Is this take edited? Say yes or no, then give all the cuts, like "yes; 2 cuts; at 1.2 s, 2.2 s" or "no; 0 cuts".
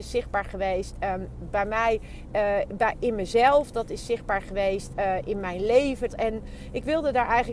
yes; 1 cut; at 6.1 s